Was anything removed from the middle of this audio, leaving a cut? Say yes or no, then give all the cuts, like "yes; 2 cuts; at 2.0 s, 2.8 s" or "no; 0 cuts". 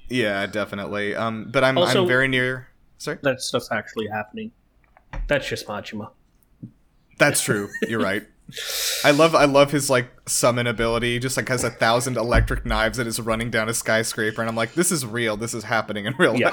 yes; 1 cut; at 3.2 s